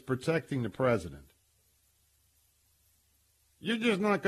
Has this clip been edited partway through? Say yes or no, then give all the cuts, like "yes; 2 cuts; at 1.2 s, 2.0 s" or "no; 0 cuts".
no; 0 cuts